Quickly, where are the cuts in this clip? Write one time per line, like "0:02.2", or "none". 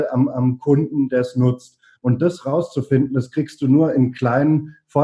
0:02.0